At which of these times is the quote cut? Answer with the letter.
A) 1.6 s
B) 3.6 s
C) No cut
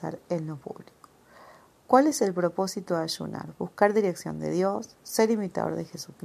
C